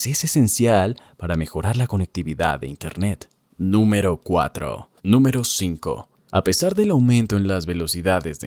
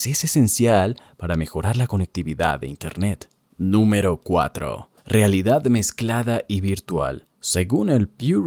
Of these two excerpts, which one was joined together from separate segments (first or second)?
first